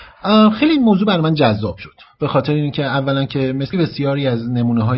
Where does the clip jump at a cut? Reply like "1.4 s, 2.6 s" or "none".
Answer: 3.7 s